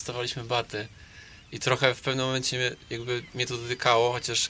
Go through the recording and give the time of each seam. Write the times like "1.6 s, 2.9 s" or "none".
none